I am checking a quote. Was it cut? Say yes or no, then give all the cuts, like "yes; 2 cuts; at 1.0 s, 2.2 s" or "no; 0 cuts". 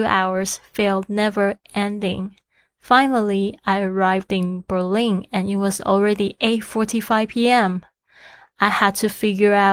no; 0 cuts